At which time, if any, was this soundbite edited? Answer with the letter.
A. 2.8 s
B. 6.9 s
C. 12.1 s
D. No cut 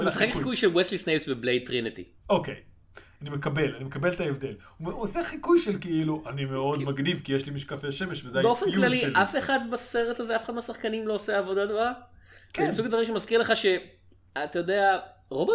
D